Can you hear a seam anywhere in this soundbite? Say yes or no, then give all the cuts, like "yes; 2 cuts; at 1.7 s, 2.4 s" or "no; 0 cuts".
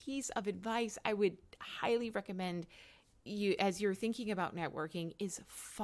no; 0 cuts